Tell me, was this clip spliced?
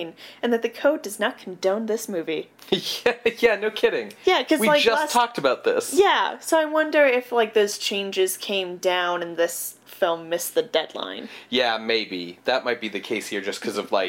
no; 0 cuts

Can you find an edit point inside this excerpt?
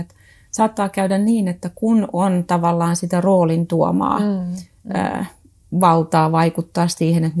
no; 0 cuts

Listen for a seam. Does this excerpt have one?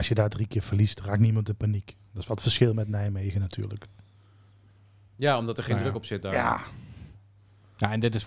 no; 0 cuts

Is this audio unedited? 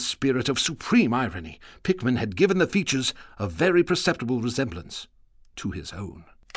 yes; 0 cuts

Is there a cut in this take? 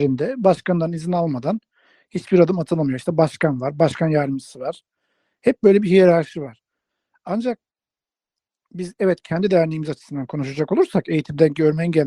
no; 0 cuts

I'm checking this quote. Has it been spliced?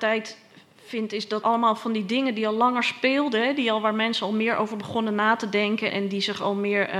yes; 2 cuts; at 1.4 s, 5.9 s

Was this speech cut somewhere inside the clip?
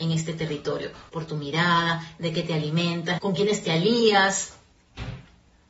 yes; 2 cuts; at 1.1 s, 3.2 s

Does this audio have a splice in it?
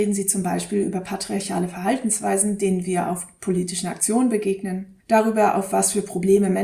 yes; 1 cut; at 5.0 s

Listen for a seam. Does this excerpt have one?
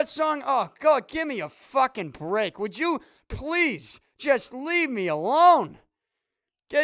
no; 0 cuts

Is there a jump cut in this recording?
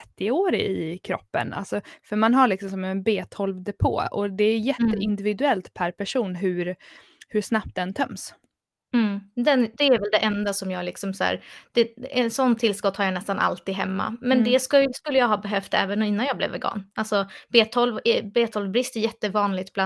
no; 0 cuts

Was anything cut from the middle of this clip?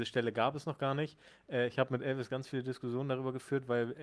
no; 0 cuts

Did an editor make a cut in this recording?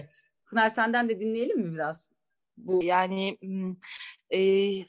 yes; 1 cut; at 2.8 s

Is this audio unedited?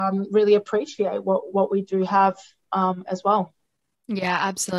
yes; 0 cuts

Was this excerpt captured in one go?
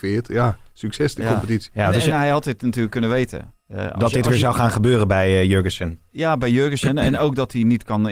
no; 1 cut; at 3.6 s

